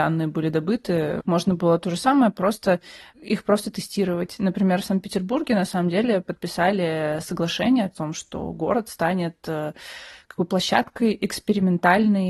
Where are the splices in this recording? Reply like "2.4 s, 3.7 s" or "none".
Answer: 1.2 s